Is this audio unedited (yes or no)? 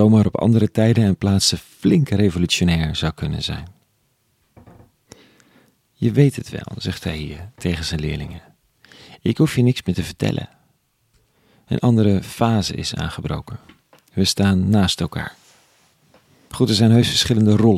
yes